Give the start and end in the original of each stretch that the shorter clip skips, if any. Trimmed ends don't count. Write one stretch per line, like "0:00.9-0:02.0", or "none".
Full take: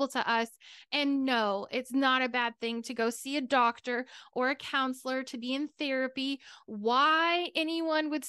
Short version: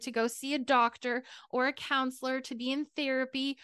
none